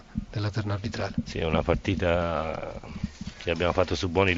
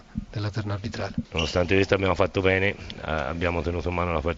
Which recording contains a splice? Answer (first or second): second